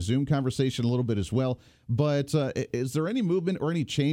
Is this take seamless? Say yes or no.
yes